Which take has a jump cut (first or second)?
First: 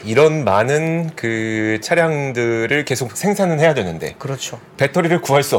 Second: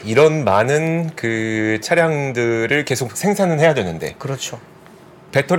first